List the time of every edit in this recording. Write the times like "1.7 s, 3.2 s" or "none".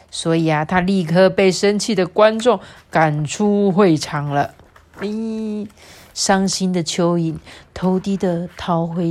8.0 s